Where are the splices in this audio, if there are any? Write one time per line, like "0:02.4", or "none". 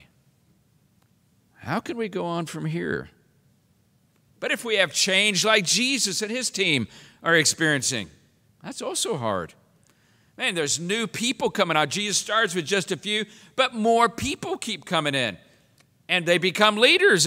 0:08.5